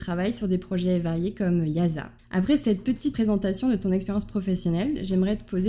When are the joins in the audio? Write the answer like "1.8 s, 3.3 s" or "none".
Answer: none